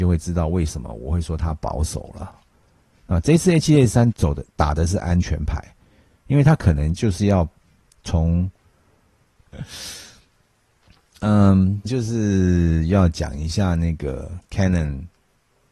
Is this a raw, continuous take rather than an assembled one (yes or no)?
no